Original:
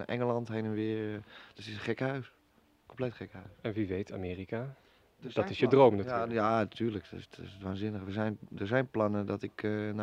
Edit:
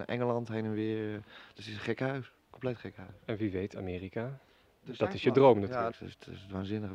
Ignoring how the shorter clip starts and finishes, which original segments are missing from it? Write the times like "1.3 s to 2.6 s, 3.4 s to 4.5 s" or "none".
2.4 s to 2.8 s, 6.3 s to 7.0 s